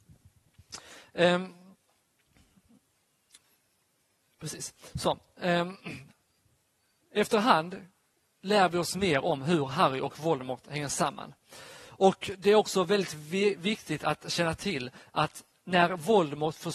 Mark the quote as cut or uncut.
uncut